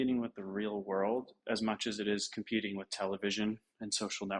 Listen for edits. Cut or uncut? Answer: uncut